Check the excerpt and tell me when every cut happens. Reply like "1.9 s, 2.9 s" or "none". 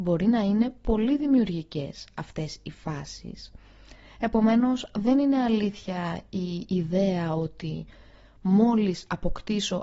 none